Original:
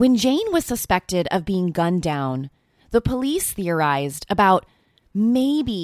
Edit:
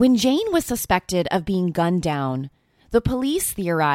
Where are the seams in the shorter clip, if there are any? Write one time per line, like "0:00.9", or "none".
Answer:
none